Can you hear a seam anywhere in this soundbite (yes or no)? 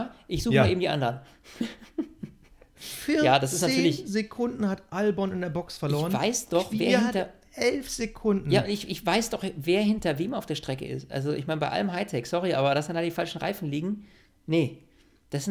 no